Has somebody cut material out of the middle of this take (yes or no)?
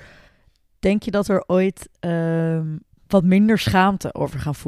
yes